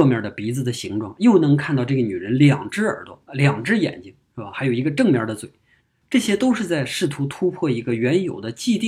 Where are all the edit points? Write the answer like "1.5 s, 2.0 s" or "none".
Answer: none